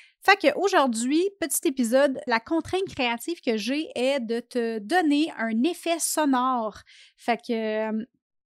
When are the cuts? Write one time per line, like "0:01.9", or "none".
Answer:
0:02.3